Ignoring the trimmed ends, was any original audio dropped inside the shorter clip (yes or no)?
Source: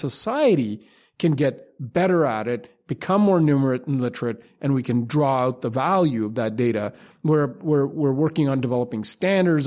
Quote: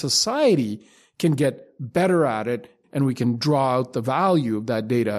yes